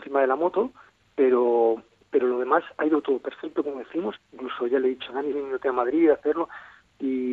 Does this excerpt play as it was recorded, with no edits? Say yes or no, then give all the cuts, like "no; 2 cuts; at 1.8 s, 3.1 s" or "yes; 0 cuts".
no; 2 cuts; at 4.2 s, 5.3 s